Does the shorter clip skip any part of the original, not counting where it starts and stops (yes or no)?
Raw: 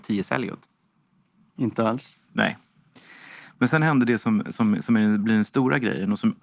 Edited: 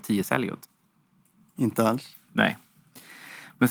no